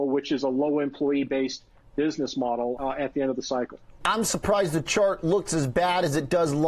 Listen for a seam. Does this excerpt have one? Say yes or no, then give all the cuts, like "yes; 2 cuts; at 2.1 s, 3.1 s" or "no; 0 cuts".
yes; 2 cuts; at 2.8 s, 4.0 s